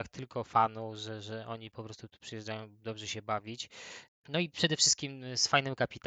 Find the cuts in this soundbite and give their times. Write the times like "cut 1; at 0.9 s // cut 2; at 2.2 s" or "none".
cut 1; at 4.1 s